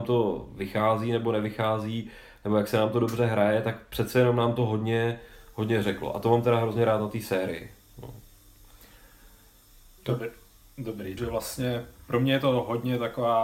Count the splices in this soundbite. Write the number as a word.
two